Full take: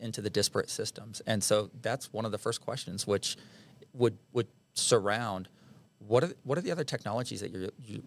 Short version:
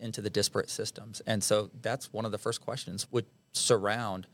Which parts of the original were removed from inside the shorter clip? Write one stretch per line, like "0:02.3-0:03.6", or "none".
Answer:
0:03.0-0:04.3